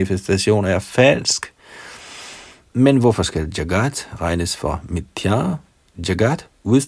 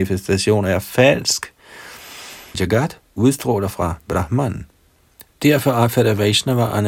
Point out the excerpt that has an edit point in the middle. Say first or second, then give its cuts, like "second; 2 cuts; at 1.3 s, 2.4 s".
second; 2 cuts; at 2.5 s, 5.3 s